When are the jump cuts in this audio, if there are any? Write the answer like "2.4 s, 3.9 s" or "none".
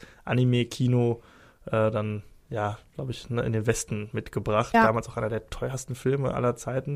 4.7 s